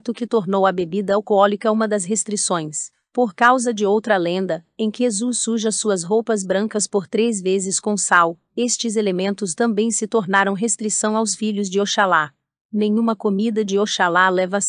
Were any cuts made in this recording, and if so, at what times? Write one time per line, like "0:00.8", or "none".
0:08.5

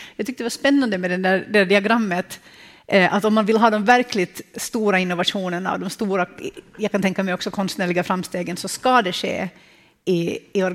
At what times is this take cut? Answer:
none

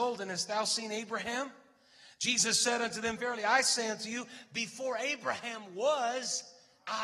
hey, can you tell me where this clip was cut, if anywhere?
0:03.2

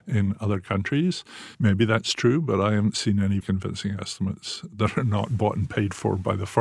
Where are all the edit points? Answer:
0:01.5
0:03.4

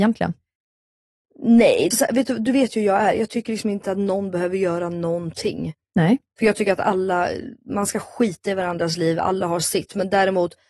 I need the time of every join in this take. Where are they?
0:01.9

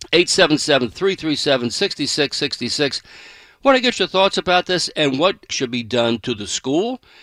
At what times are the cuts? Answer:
0:05.5

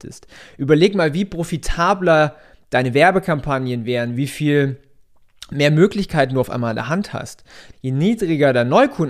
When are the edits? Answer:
0:04.1
0:07.7

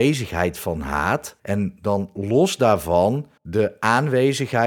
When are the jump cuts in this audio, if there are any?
0:01.4
0:03.4

